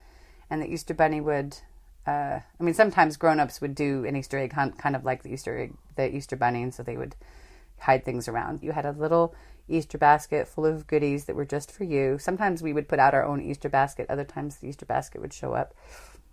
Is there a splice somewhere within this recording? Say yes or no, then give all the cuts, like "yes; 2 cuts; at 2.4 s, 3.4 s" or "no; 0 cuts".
yes; 1 cut; at 8.6 s